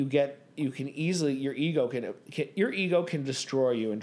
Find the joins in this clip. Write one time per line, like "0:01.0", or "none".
none